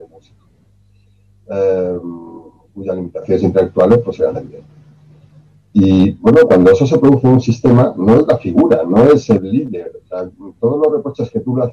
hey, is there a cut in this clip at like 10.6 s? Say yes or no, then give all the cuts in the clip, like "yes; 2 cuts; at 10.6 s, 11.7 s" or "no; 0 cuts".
no; 0 cuts